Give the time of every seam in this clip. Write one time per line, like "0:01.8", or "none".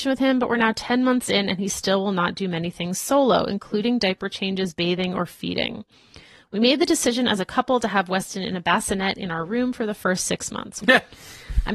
0:10.8

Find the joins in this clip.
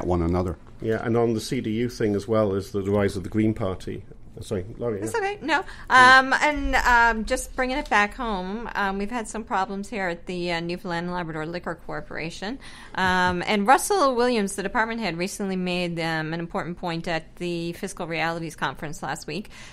none

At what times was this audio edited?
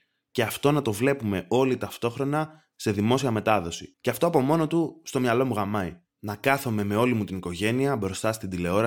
0:03.9

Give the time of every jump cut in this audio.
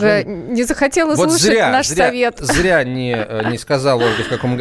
none

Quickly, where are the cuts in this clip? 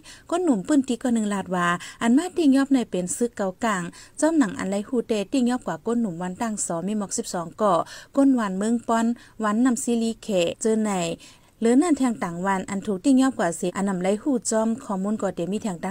none

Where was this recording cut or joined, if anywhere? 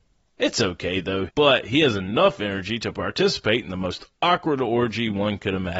0:01.3

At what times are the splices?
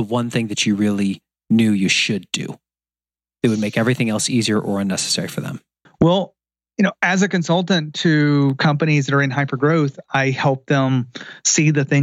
0:05.8

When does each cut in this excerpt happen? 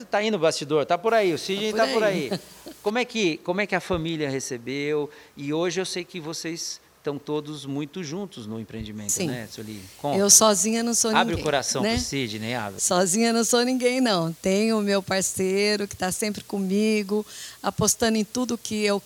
none

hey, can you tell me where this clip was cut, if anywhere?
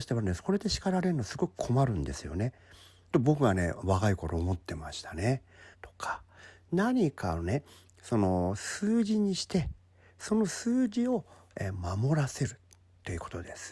0:03.1
0:05.7

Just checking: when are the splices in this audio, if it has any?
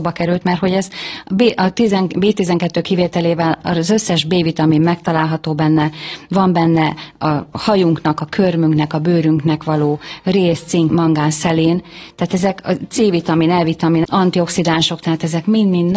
0:10.9
0:14.0

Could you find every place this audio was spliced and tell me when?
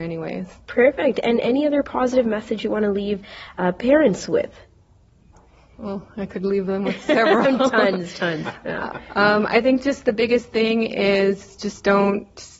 none

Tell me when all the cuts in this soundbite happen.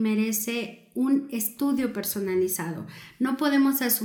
none

